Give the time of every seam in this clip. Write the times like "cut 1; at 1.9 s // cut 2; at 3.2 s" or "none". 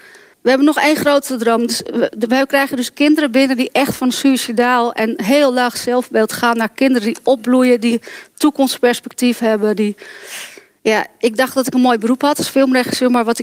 none